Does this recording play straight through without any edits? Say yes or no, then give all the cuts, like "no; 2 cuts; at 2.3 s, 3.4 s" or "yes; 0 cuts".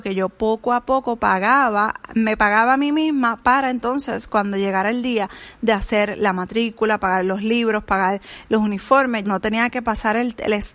no; 1 cut; at 9.2 s